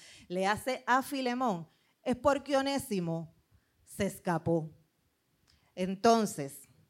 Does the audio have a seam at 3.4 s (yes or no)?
no